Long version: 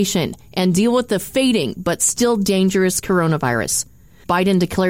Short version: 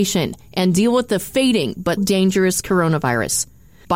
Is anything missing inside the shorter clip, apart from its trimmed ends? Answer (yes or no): yes